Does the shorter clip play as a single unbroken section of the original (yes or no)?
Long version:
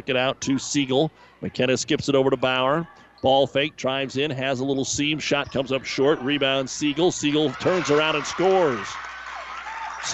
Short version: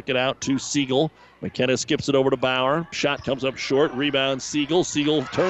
no